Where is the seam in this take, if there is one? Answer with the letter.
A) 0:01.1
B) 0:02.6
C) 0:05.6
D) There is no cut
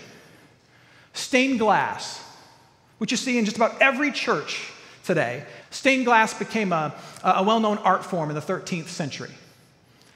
C